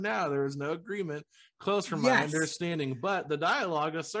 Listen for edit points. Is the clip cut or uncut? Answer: uncut